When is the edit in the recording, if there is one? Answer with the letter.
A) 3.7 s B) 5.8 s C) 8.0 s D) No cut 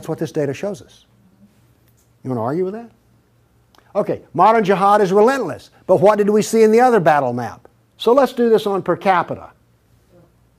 C